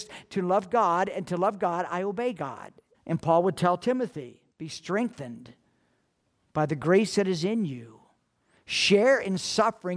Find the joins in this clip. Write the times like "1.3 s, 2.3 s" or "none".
2.9 s, 4.5 s